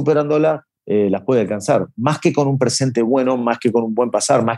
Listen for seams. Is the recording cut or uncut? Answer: uncut